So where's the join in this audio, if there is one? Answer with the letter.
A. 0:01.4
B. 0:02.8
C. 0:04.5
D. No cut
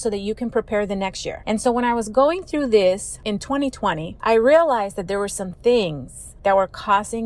D